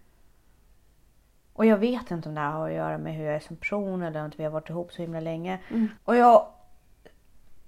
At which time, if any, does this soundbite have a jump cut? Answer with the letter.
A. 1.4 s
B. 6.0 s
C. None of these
B